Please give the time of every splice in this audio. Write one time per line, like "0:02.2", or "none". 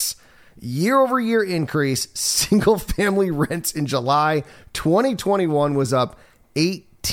none